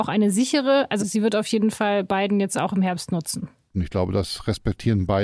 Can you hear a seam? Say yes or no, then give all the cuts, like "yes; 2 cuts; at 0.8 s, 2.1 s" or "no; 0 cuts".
yes; 2 cuts; at 1.0 s, 3.7 s